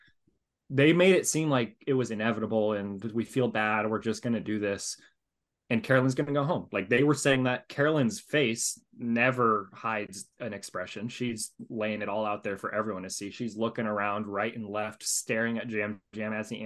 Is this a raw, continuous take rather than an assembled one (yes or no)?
yes